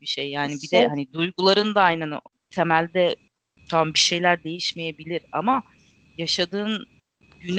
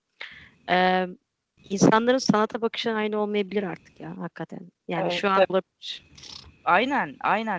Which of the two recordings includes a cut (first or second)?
second